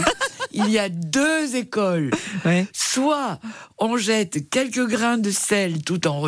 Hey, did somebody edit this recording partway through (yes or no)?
no